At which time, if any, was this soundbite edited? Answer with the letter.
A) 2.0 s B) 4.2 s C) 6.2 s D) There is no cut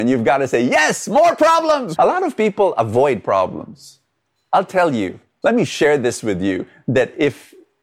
A